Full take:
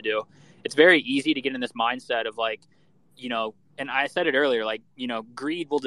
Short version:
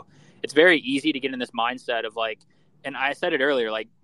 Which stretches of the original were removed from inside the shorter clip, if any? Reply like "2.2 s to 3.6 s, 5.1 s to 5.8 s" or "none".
3.0 s to 3.7 s